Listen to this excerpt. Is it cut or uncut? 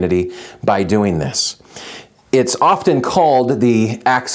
cut